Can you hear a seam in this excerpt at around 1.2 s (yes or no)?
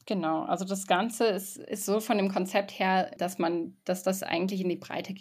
no